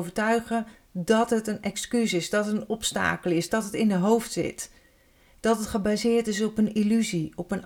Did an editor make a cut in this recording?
yes; 1 cut; at 3.5 s

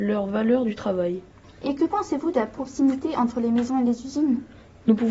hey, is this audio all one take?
no; 1 cut; at 1.4 s

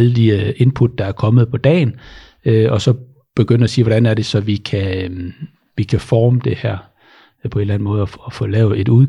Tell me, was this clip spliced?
no; 0 cuts

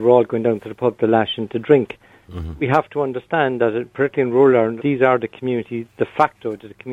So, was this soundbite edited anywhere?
yes; 1 cut; at 4.8 s

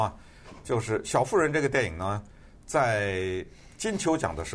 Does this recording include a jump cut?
no; 0 cuts

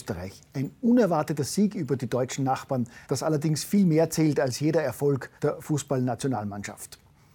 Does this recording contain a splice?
yes; 2 cuts; at 3.0 s, 5.4 s

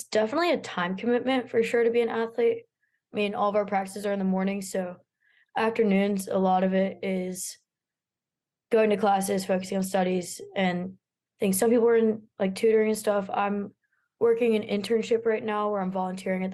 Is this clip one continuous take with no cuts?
yes; 0 cuts

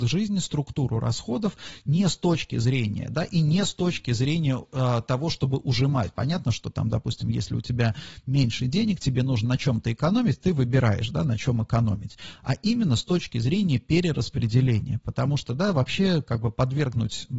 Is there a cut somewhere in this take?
no; 0 cuts

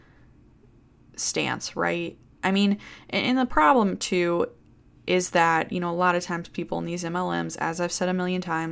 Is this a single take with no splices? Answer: yes; 0 cuts

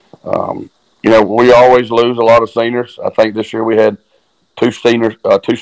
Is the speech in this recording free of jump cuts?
yes; 0 cuts

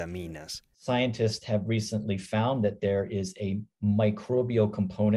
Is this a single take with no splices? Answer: yes; 0 cuts

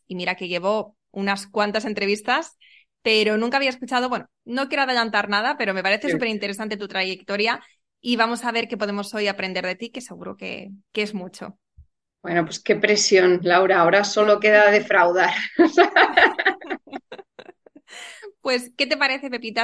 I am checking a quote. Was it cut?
no; 0 cuts

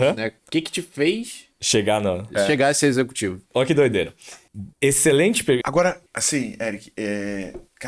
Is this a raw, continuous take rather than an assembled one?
no; 1 cut; at 5.6 s

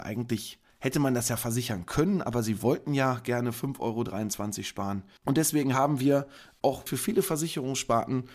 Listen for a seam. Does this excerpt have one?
yes; 2 cuts; at 5.2 s, 6.9 s

